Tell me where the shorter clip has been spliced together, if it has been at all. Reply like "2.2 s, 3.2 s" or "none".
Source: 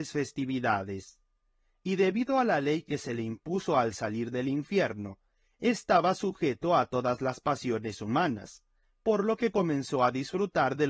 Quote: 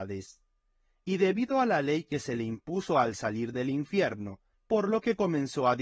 4.5 s